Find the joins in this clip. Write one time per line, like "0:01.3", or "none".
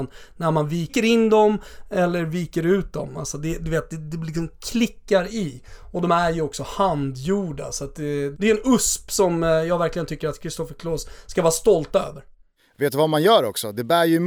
0:08.3